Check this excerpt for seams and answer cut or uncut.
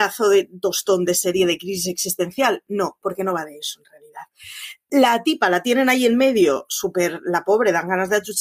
uncut